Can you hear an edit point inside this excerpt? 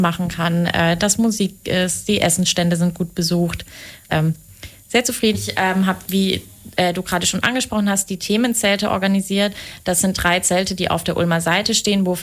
yes; 2 cuts; at 4.1 s, 5.3 s

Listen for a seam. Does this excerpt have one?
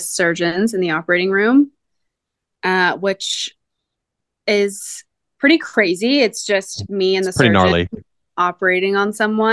no; 0 cuts

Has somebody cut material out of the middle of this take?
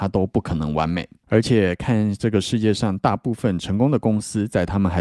yes; 1 cut; at 1.2 s

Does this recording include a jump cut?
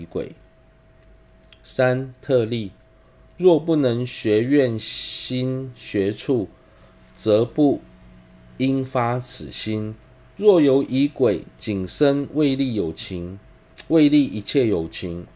no; 0 cuts

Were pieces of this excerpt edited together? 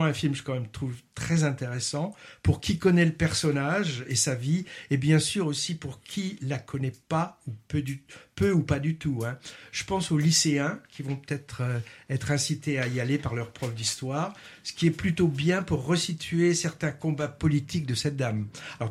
no; 0 cuts

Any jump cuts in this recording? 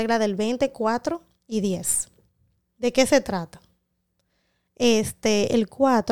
yes; 1 cut; at 4.7 s

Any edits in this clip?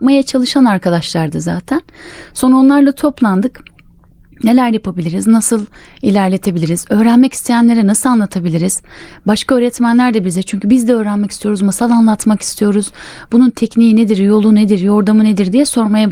no; 0 cuts

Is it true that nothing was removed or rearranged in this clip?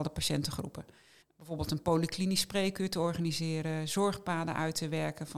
no; 1 cut; at 1.2 s

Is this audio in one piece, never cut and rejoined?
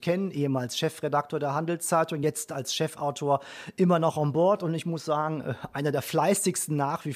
yes; 0 cuts

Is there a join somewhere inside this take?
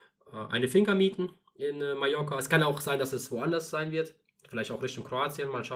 no; 0 cuts

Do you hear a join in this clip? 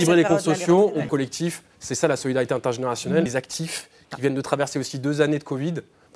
yes; 2 cuts; at 1.1 s, 3.3 s

